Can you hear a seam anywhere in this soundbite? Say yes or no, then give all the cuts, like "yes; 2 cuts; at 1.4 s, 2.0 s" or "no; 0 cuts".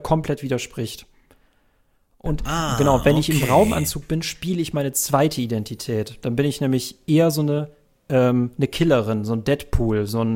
no; 0 cuts